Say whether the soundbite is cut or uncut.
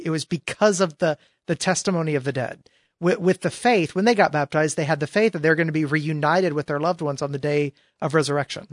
uncut